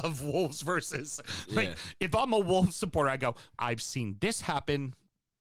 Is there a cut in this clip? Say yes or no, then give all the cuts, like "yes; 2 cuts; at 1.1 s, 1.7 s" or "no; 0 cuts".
yes; 1 cut; at 3.6 s